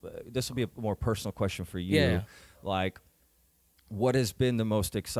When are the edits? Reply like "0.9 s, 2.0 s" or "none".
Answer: none